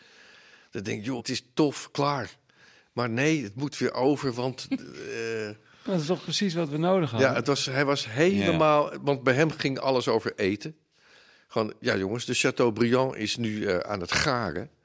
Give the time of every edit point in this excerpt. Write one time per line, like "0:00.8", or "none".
0:01.2